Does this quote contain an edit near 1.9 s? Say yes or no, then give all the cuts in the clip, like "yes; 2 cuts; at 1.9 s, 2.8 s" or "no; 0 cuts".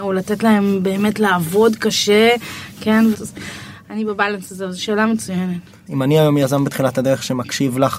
no; 2 cuts; at 3.1 s, 5.9 s